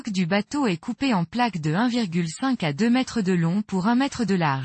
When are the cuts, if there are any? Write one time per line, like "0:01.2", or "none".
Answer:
none